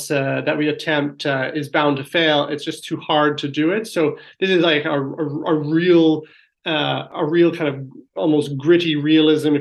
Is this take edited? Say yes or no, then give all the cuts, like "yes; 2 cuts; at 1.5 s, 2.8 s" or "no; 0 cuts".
no; 0 cuts